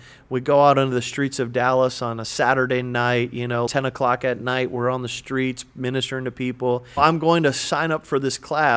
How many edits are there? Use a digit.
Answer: 2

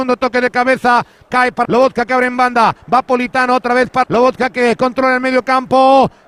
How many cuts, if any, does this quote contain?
2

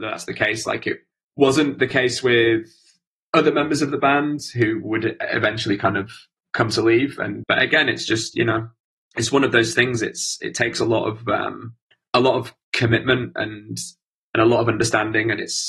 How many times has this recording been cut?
1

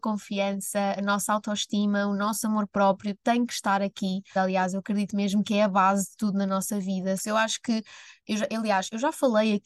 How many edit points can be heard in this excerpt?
2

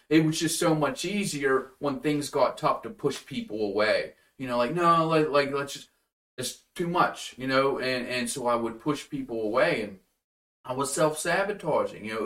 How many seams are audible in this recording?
0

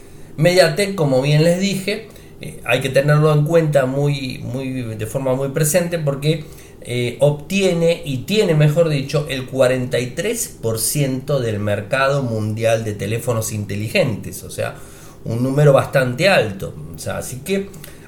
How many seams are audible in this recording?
0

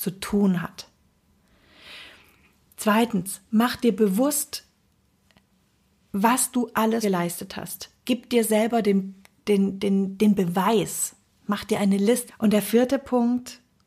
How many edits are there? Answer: 2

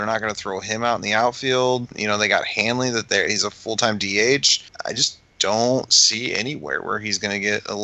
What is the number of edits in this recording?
0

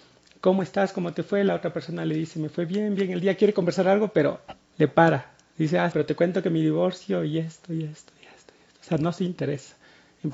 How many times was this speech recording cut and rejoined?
1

